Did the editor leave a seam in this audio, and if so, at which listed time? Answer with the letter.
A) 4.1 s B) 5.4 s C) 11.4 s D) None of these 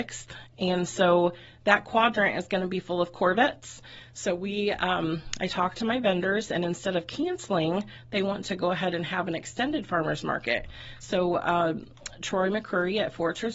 D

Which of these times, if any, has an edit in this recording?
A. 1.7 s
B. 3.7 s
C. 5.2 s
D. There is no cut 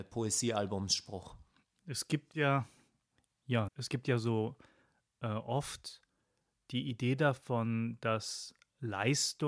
B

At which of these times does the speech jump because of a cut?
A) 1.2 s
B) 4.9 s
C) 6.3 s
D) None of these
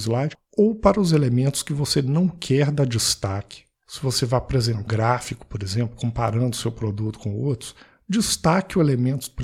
B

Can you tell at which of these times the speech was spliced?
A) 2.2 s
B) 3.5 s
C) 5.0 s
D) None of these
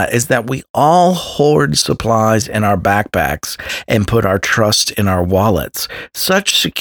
D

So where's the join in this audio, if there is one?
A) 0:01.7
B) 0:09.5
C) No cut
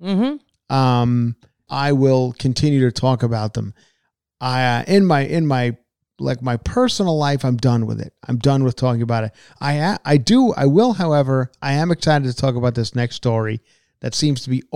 A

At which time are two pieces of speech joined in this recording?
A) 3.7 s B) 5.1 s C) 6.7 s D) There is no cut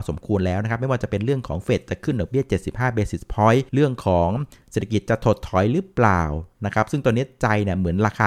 A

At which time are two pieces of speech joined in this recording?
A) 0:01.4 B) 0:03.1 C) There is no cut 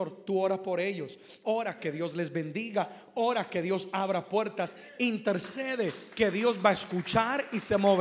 A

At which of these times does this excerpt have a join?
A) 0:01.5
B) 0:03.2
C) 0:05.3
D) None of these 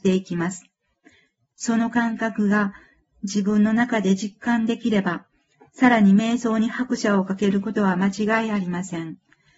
A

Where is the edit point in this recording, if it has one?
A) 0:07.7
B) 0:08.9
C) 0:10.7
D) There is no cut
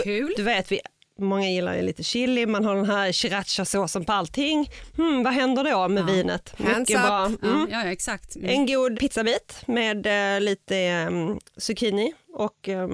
B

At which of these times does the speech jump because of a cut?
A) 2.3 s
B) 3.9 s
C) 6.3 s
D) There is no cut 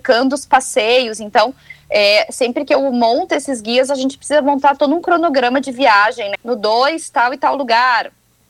C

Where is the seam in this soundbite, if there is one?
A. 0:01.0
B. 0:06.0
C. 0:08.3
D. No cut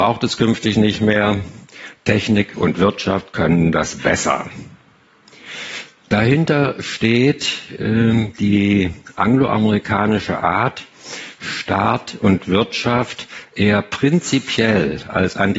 D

